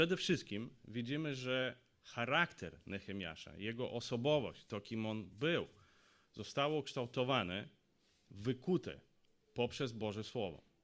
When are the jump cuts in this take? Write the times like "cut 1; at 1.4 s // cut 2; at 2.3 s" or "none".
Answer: none

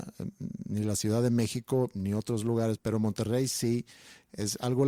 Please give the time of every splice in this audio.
cut 1; at 2.8 s

